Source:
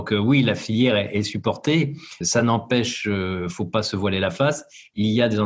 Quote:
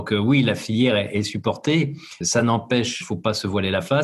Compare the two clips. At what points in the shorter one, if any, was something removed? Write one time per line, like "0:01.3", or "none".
0:03.0